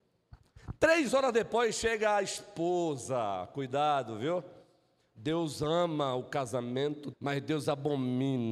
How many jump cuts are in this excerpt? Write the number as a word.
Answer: one